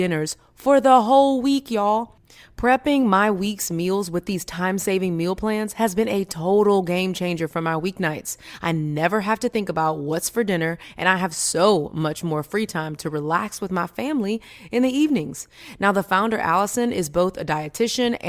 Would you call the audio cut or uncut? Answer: uncut